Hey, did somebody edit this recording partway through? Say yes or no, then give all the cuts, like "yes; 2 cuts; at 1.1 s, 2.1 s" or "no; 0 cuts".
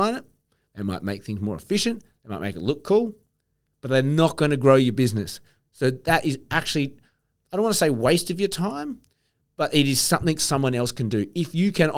no; 0 cuts